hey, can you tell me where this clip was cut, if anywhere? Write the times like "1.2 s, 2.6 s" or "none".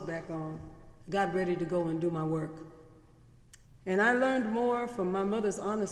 1.0 s, 3.6 s

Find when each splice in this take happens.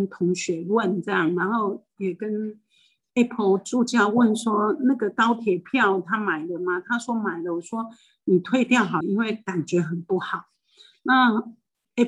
9.0 s

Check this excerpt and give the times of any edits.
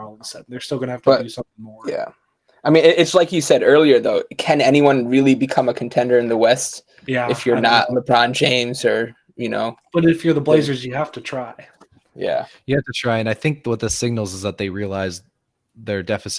none

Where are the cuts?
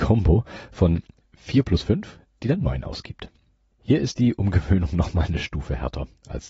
3.7 s

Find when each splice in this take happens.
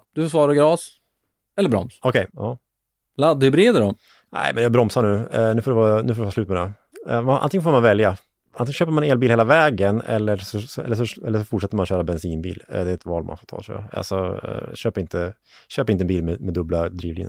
2.3 s

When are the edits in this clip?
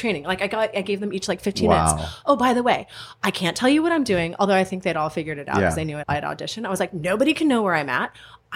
6.0 s

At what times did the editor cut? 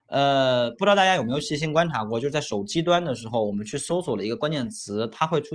none

